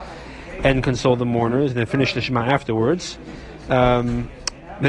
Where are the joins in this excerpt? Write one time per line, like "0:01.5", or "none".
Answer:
none